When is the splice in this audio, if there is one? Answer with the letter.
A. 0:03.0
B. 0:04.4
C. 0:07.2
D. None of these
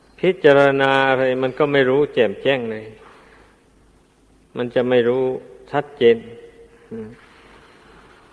D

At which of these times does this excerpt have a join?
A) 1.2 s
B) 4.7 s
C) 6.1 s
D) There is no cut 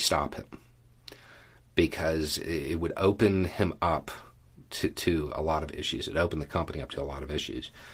D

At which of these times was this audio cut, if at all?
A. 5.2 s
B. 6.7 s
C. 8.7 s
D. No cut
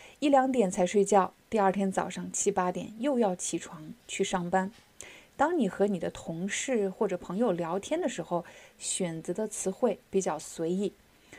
C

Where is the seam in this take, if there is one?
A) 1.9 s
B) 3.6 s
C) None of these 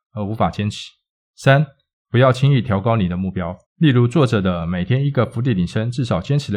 B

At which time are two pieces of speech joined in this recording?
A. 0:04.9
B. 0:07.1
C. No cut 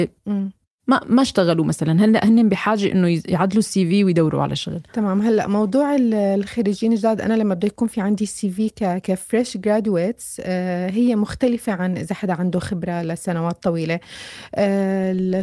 A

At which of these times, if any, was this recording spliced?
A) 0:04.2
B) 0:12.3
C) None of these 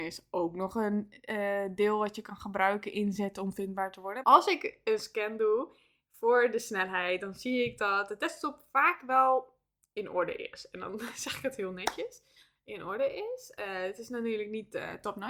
A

